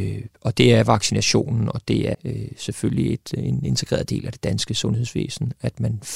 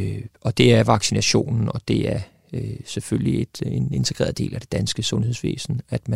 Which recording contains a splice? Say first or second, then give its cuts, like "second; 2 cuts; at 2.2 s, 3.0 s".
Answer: first; 1 cut; at 2.1 s